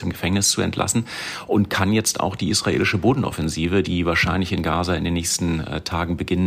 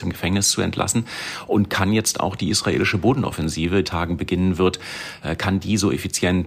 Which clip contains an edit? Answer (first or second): second